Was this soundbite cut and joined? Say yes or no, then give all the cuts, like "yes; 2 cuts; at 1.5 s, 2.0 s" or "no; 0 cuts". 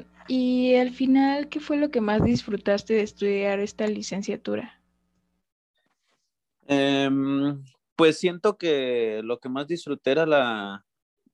no; 0 cuts